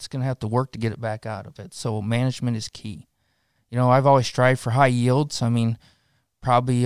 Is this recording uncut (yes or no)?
no